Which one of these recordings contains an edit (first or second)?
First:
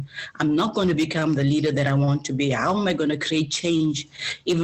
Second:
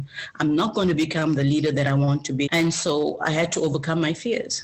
second